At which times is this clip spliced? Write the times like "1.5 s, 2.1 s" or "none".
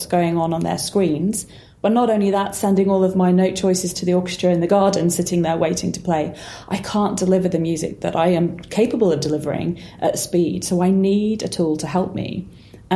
none

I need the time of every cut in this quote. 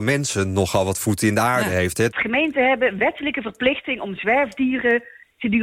2.1 s

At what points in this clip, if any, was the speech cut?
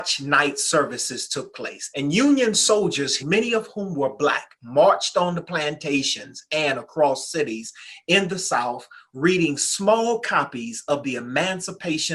1.9 s, 3.2 s

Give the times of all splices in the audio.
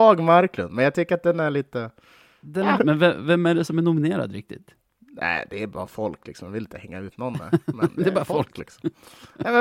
2.8 s

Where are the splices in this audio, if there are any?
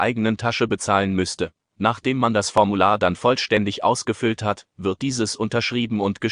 1.7 s

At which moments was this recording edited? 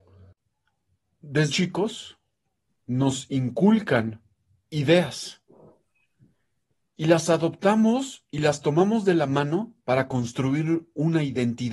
1.5 s

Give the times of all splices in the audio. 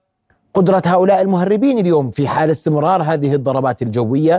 2.1 s

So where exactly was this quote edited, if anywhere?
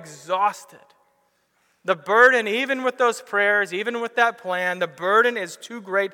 none

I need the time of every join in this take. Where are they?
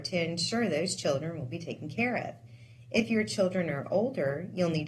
none

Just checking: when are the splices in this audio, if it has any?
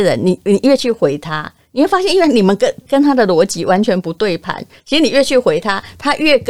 2.8 s, 4.8 s

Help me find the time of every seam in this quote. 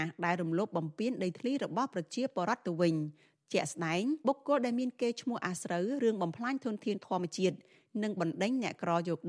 4.2 s

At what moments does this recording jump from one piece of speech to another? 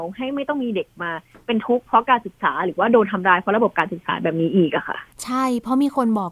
5.1 s

